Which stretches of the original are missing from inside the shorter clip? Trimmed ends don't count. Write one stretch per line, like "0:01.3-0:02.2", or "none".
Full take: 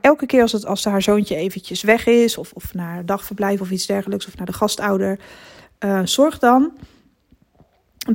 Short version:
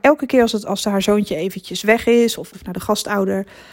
0:02.5-0:04.3